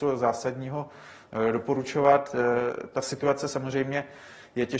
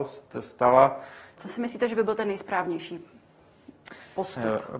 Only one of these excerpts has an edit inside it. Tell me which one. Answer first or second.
second